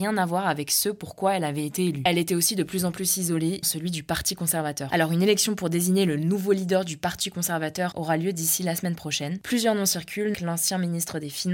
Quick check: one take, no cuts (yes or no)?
no